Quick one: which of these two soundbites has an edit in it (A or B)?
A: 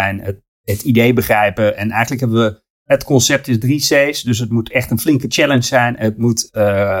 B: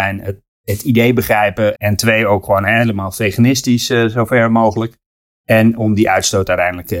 B